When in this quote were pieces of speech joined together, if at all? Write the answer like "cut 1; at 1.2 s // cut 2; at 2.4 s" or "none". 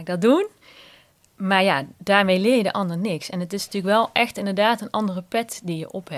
none